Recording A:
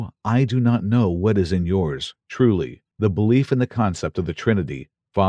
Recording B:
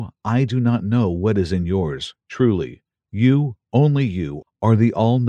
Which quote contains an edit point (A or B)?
A